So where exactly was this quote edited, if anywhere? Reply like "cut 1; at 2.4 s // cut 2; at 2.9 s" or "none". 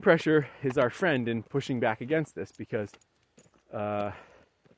none